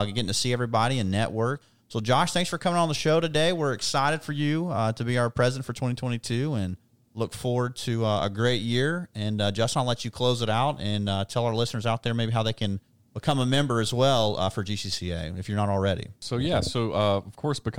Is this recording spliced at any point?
no; 0 cuts

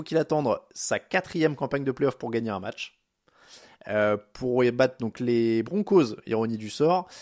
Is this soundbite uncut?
yes; 0 cuts

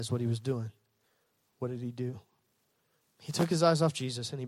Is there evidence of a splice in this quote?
yes; 1 cut; at 3.0 s

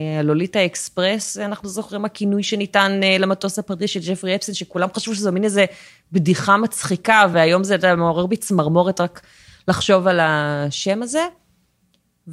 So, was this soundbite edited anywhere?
no; 0 cuts

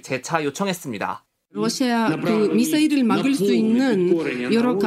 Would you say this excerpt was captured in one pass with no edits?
yes; 0 cuts

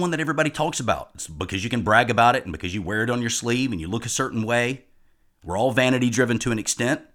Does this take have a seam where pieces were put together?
no; 0 cuts

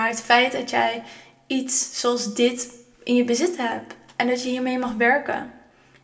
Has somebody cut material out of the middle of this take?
no; 0 cuts

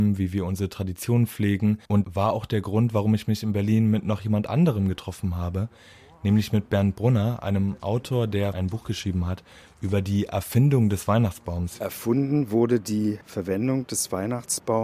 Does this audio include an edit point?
yes; 1 cut; at 1.9 s

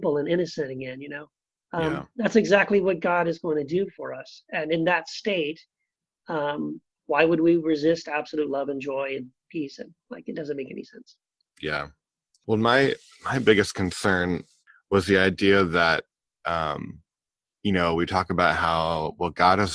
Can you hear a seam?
no; 0 cuts

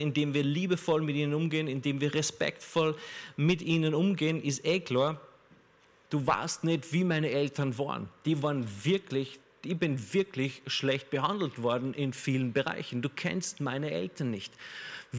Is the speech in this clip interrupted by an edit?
yes; 1 cut; at 5.9 s

